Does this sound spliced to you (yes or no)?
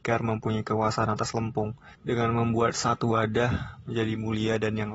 yes